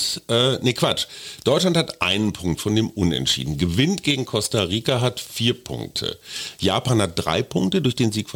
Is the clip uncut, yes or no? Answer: yes